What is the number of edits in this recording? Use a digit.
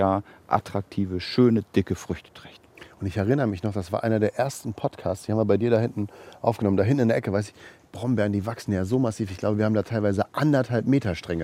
0